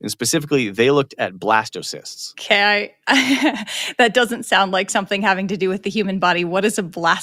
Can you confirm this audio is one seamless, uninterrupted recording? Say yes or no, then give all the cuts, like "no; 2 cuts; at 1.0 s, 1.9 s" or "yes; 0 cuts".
yes; 0 cuts